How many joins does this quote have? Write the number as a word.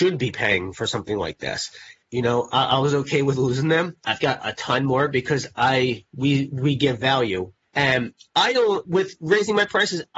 three